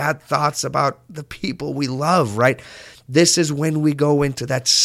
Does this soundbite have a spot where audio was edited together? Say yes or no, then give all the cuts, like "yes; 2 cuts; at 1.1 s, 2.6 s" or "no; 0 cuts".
no; 0 cuts